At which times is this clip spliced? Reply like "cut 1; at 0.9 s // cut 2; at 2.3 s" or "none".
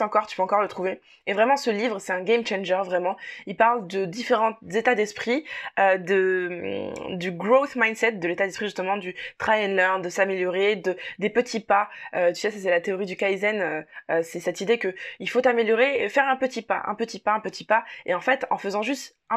none